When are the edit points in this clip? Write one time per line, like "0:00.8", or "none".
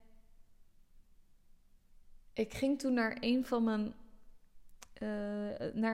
0:02.2